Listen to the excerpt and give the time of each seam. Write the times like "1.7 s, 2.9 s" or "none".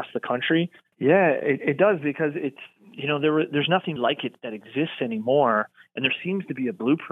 0.9 s, 4.0 s